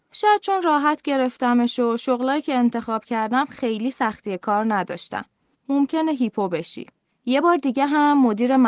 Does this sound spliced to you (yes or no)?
yes